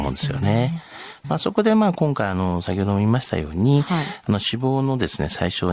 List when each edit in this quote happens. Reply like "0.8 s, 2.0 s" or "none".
1.2 s